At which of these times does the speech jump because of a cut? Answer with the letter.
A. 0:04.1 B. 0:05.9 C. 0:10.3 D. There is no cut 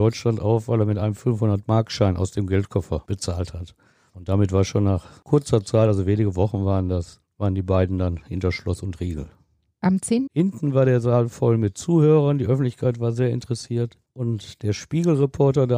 C